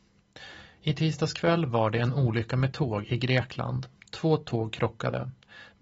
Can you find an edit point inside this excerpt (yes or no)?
no